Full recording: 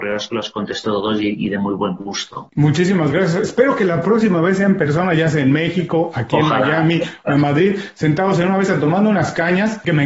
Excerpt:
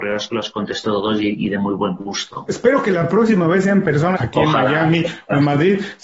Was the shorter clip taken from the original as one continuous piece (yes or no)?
no